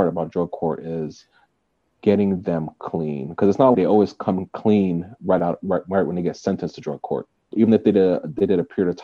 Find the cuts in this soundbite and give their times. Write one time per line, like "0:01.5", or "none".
0:03.7
0:07.5